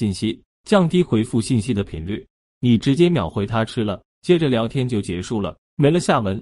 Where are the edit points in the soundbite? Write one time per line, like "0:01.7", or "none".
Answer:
0:02.4